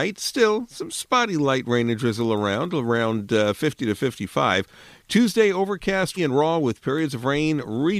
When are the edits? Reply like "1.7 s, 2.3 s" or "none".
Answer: 6.2 s